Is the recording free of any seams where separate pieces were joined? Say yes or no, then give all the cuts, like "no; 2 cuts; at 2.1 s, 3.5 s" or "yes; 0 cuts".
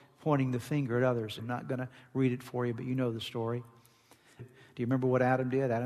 no; 2 cuts; at 1.4 s, 4.4 s